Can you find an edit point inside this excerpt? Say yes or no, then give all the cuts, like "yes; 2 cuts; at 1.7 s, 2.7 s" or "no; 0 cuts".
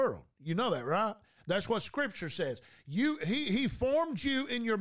no; 0 cuts